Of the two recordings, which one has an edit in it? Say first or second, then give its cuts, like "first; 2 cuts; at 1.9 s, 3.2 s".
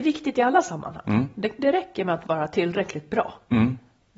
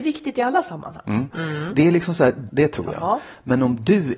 second; 2 cuts; at 1.3 s, 2.5 s